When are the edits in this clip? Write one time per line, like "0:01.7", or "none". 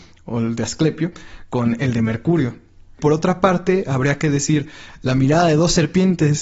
none

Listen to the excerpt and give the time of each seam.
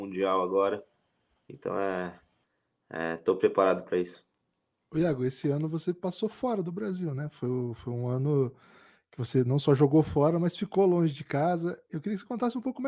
none

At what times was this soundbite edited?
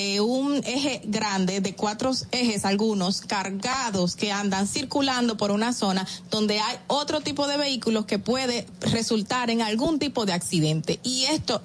none

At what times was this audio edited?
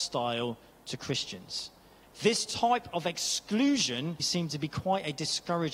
0:02.0
0:04.2

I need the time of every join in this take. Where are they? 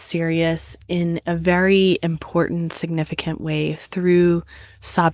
none

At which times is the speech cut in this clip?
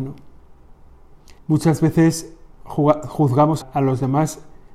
0:01.4
0:03.6

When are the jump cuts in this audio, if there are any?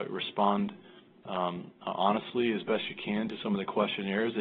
none

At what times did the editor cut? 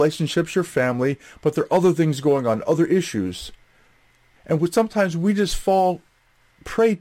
0:04.4

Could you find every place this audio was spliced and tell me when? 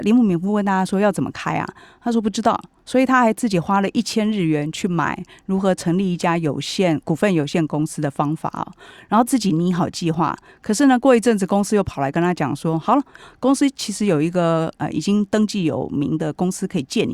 none

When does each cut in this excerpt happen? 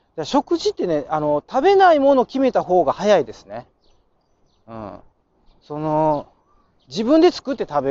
none

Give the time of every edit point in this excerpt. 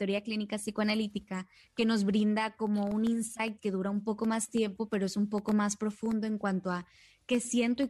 none

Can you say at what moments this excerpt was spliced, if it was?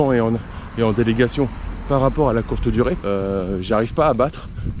0:03.0

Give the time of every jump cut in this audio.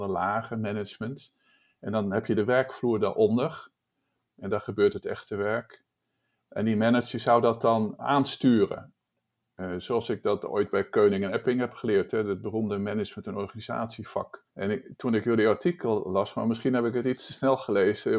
0:14.5

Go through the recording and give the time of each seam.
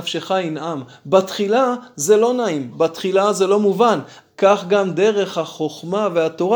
0:02.7
0:04.3

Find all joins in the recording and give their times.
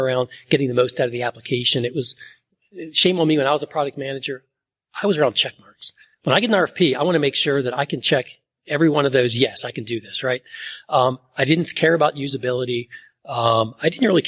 none

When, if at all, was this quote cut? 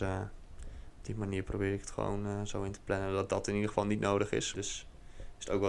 0:04.5

